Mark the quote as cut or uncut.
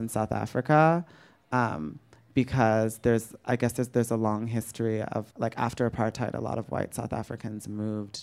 cut